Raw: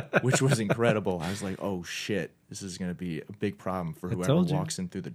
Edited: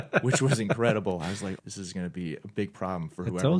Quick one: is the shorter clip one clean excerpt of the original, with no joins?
no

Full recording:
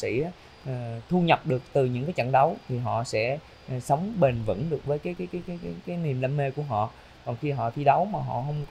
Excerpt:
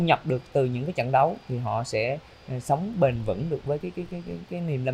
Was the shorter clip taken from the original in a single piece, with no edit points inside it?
no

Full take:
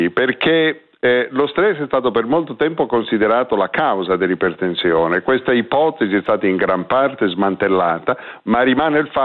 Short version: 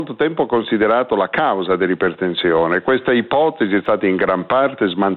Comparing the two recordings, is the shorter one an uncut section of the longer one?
yes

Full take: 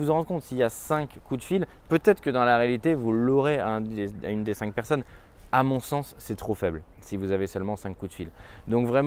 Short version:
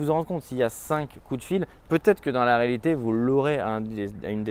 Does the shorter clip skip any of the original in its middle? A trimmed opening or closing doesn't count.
no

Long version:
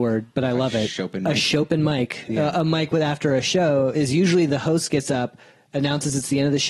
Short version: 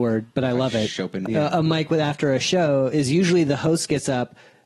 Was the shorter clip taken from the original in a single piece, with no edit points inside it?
no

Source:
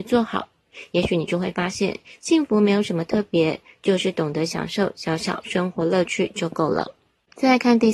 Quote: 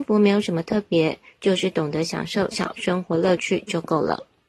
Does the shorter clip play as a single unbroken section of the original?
no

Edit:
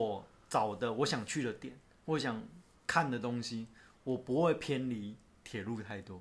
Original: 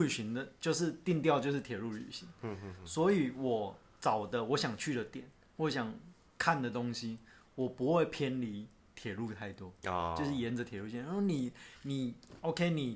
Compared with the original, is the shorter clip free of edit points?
yes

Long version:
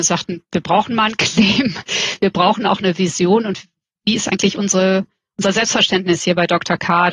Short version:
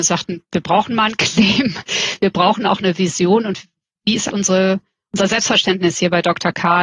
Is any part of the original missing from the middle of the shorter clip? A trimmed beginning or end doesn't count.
yes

